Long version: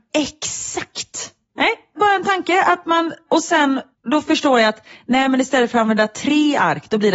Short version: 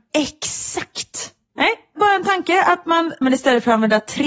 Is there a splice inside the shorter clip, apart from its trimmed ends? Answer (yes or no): yes